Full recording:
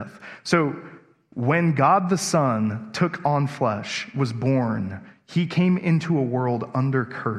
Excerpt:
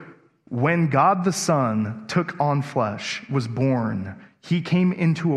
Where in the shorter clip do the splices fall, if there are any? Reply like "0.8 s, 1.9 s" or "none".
none